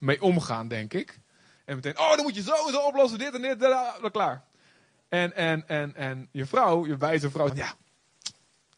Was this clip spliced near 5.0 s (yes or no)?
no